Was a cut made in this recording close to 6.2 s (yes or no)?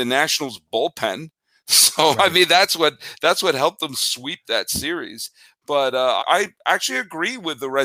yes